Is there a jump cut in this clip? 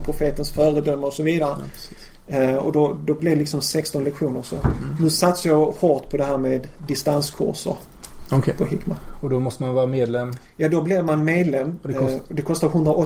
no; 0 cuts

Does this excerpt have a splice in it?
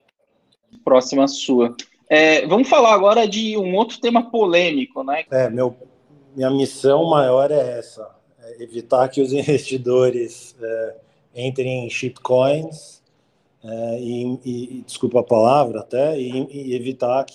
yes; 1 cut; at 5.3 s

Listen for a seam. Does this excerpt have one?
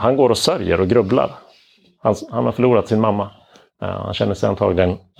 no; 0 cuts

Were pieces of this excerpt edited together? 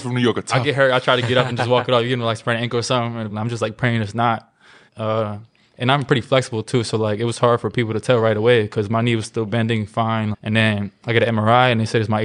yes; 3 cuts; at 3.3 s, 4.9 s, 10.3 s

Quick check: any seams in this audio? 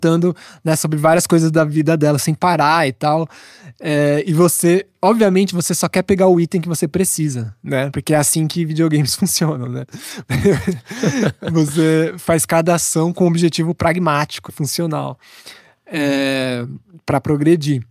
yes; 1 cut; at 14.5 s

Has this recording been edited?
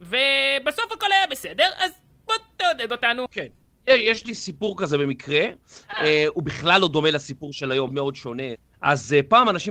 yes; 1 cut; at 7.9 s

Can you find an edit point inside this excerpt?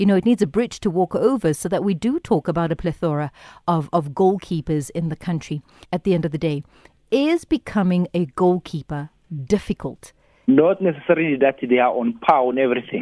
yes; 2 cuts; at 5.8 s, 10.4 s

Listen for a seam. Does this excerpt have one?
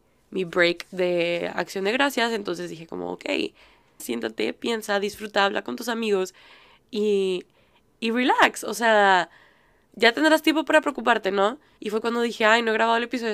yes; 2 cuts; at 4.0 s, 11.8 s

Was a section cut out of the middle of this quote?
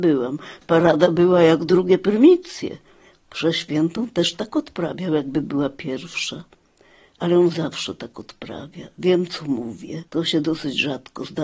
yes; 1 cut; at 10.1 s

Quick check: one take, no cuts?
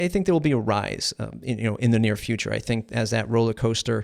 yes; 0 cuts

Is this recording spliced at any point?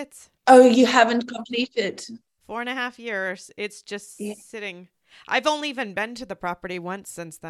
yes; 1 cut; at 2.4 s

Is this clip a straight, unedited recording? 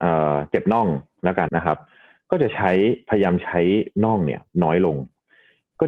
no; 1 cut; at 1.5 s

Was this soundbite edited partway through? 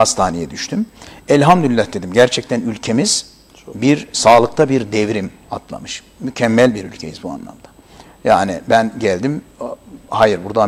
no; 0 cuts

